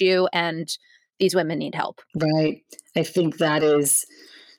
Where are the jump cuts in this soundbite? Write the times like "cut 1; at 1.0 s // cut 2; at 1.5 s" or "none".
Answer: cut 1; at 2.1 s